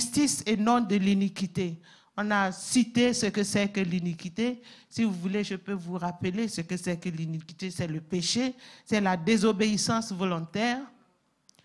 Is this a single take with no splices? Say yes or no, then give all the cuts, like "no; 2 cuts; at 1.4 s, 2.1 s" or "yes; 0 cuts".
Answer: yes; 0 cuts